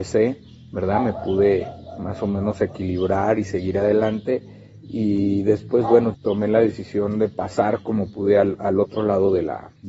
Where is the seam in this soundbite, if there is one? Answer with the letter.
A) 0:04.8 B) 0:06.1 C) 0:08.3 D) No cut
B